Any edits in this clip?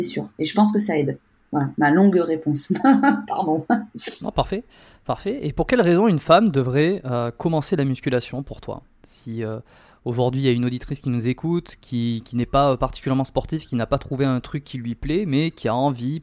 no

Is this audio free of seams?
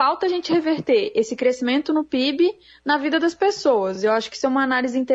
yes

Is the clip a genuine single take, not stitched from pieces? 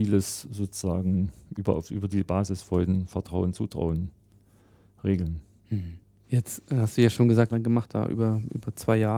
no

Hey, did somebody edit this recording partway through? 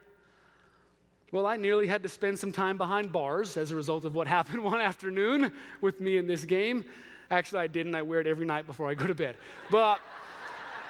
yes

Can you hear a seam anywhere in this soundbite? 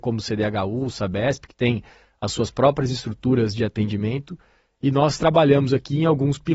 no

